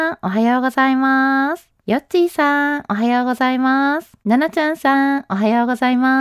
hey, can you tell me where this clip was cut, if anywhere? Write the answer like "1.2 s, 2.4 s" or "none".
1.8 s, 4.2 s